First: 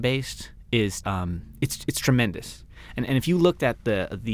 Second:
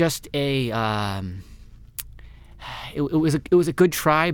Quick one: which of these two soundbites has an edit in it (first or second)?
first